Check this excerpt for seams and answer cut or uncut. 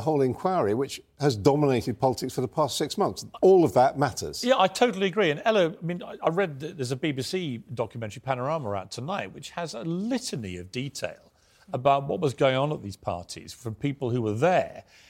uncut